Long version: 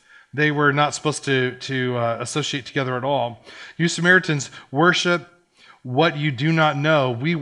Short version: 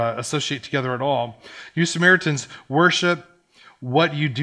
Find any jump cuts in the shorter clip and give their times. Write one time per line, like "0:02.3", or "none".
none